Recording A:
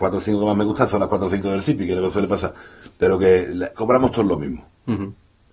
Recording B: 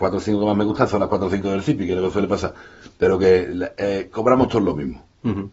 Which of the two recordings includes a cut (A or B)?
A